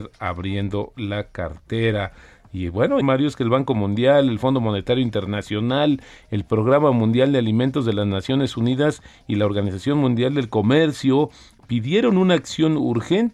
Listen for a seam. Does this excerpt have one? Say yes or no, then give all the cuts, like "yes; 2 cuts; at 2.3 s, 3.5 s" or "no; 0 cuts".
yes; 1 cut; at 3.0 s